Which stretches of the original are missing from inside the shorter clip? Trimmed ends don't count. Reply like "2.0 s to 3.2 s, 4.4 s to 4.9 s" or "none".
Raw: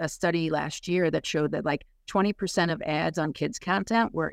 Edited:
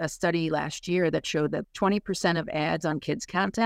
1.6 s to 2.0 s